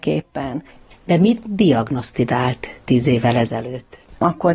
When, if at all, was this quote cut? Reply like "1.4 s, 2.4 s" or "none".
0.9 s